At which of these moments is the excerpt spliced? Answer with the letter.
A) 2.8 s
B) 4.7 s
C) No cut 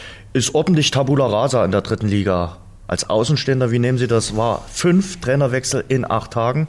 C